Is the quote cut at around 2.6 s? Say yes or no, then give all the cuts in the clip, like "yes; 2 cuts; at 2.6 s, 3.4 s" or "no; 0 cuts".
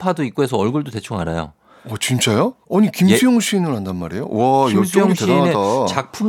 yes; 1 cut; at 2.6 s